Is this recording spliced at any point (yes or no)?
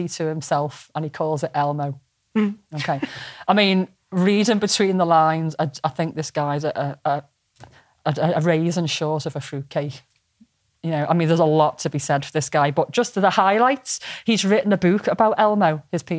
no